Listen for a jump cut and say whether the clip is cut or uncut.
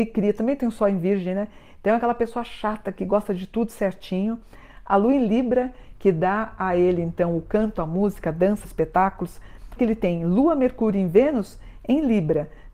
cut